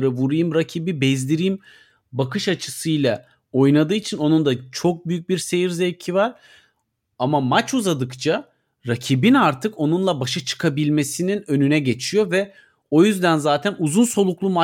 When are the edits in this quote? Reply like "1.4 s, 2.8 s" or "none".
7.1 s